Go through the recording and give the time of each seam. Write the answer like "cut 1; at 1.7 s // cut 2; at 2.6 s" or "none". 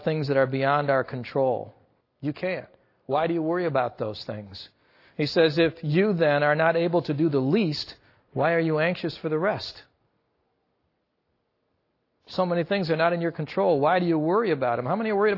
cut 1; at 2.0 s